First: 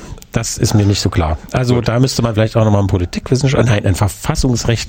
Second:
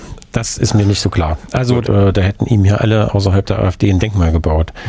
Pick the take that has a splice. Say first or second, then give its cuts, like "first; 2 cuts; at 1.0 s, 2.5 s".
second; 1 cut; at 1.8 s